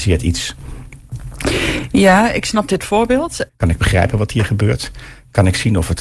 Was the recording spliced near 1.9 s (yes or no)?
no